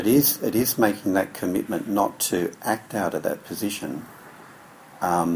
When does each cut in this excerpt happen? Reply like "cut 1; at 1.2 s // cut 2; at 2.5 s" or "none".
none